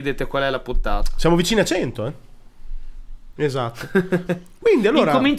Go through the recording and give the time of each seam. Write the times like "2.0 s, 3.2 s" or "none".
3.4 s